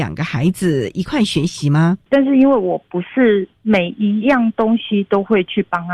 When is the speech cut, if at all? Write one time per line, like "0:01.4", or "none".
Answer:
0:02.1